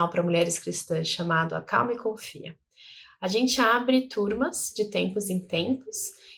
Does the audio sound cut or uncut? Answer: uncut